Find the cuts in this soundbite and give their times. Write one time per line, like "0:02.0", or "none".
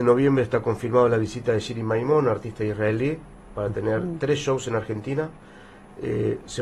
none